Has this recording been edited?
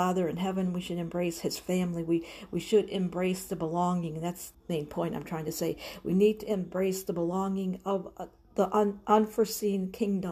yes; 1 cut; at 4.5 s

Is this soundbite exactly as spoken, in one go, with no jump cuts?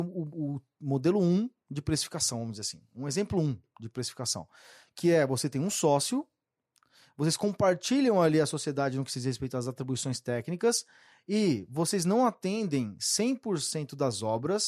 yes; 0 cuts

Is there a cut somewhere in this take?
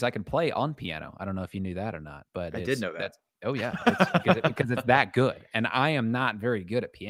no; 0 cuts

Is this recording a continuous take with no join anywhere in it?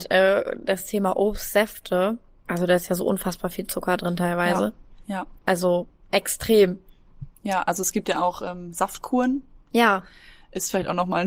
no; 1 cut; at 2.5 s

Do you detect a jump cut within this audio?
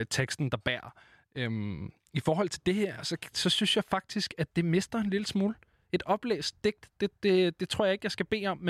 no; 0 cuts

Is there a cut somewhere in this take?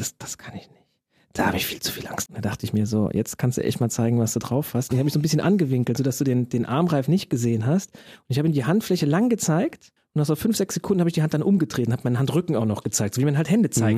yes; 1 cut; at 2.3 s

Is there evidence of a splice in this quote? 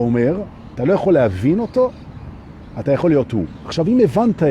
no; 0 cuts

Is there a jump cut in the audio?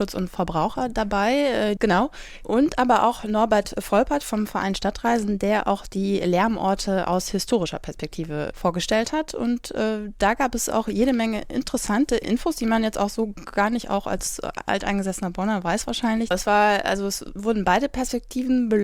yes; 2 cuts; at 1.8 s, 16.3 s

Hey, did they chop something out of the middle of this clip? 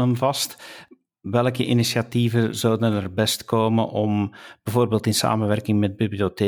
no; 0 cuts

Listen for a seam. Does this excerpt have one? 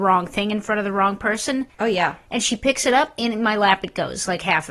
yes; 1 cut; at 1.7 s

